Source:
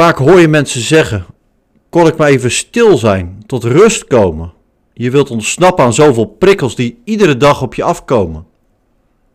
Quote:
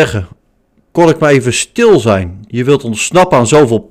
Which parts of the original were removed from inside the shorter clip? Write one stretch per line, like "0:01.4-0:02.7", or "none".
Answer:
0:03.5-0:04.9